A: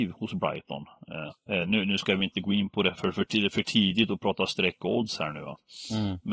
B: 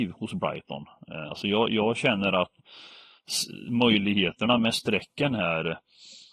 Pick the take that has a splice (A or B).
A